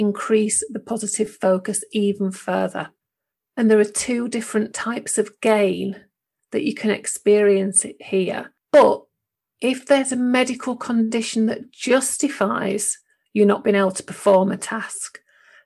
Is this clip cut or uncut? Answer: cut